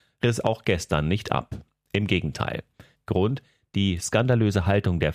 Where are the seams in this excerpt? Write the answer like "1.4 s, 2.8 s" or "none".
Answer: 2.9 s